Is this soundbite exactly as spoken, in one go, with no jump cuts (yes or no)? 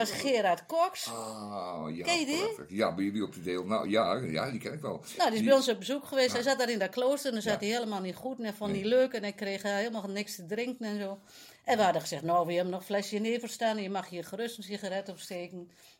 yes